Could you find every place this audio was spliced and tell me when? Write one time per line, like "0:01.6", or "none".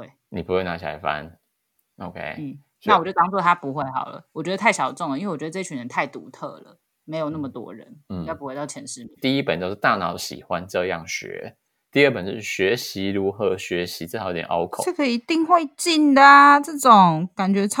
0:09.2